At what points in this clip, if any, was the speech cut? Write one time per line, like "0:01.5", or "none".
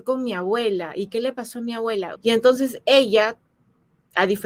0:02.2